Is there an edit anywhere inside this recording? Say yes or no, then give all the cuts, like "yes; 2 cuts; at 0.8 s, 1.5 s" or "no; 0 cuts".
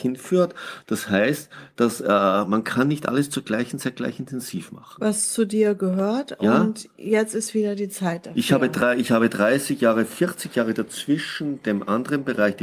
no; 0 cuts